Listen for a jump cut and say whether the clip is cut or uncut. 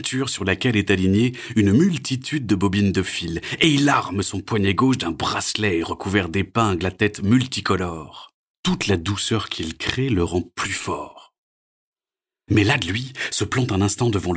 cut